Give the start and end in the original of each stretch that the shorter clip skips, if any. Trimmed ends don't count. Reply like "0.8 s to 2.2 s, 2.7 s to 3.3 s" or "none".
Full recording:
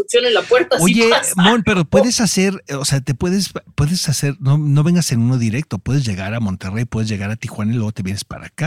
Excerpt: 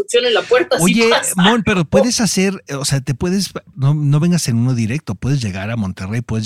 3.7 s to 4.4 s